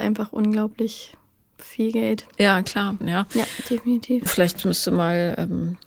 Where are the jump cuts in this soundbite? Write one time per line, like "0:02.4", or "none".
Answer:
0:03.0
0:04.3